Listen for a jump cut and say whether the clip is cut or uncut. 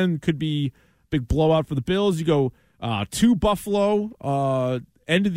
uncut